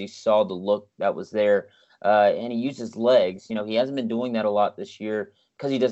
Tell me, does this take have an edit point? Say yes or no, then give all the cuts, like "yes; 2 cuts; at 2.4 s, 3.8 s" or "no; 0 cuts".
no; 0 cuts